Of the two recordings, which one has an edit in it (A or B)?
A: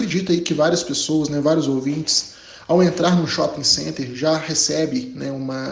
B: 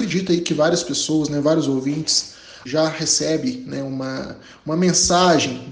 B